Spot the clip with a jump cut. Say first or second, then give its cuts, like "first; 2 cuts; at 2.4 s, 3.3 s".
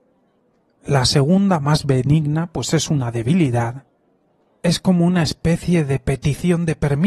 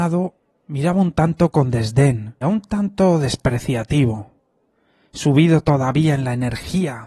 second; 1 cut; at 2.4 s